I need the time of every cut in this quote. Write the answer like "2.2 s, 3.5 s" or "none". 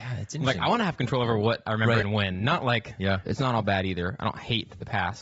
3.2 s